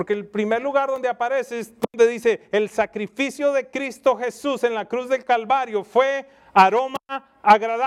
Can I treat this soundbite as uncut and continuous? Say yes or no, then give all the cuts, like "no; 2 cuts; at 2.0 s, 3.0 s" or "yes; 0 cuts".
yes; 0 cuts